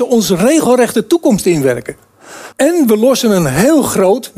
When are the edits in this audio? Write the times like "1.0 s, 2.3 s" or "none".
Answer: 2.5 s

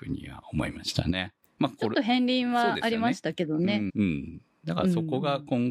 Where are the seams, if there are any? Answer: 1.4 s, 3.9 s

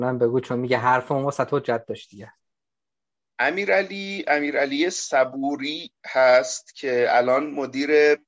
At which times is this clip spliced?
none

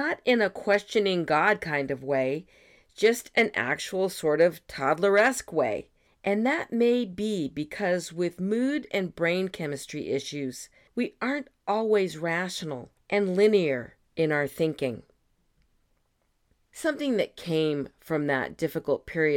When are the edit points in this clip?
6.1 s

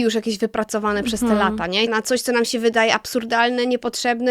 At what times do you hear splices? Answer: 1.9 s

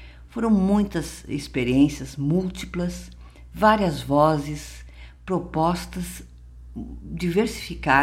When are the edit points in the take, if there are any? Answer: none

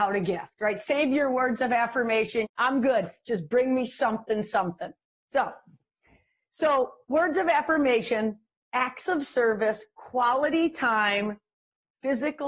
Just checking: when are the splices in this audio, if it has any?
2.4 s

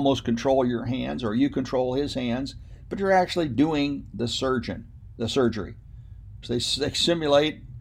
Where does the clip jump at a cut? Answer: 6.4 s

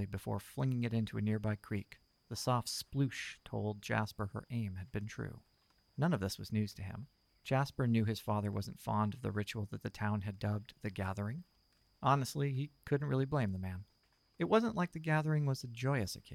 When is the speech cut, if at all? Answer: none

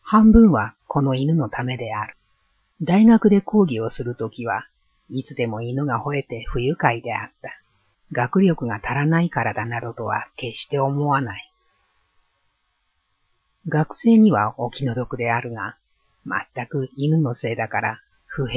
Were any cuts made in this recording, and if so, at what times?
2.7 s, 7.9 s

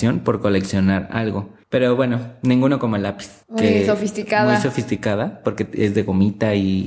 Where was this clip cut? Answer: 1.6 s, 3.4 s

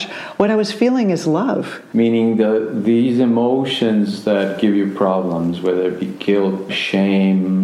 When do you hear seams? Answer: 1.9 s, 6.7 s

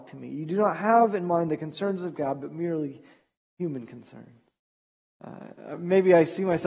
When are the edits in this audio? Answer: 5.1 s

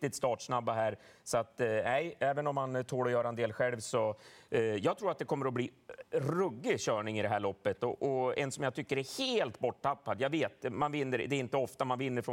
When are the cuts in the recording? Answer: none

